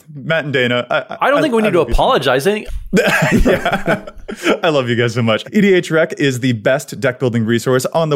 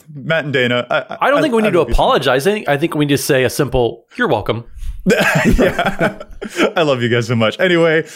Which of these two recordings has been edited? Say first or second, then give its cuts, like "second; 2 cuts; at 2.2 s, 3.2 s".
first; 2 cuts; at 2.7 s, 5.4 s